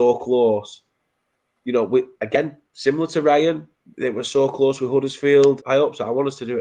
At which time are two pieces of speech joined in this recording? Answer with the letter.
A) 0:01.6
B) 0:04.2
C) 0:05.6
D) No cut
C